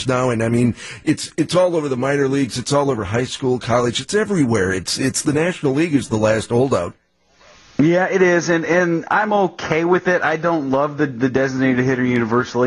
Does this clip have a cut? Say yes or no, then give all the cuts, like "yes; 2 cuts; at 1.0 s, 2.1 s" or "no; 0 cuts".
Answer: no; 0 cuts